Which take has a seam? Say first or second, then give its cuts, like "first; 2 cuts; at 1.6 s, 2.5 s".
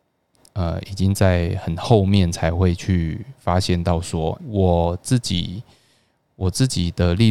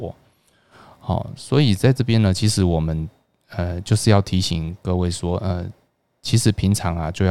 first; 1 cut; at 4.4 s